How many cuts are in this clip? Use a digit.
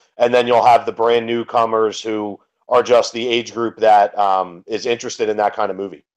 0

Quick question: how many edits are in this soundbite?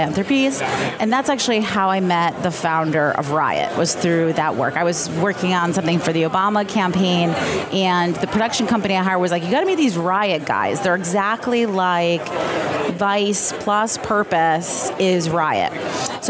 1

